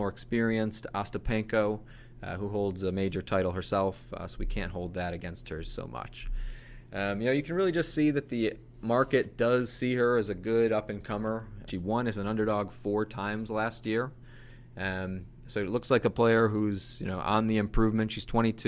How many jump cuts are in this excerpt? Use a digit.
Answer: 1